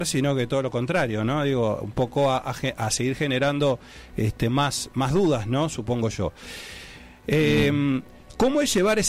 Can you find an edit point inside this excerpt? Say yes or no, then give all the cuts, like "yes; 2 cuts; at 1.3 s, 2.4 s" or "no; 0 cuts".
no; 0 cuts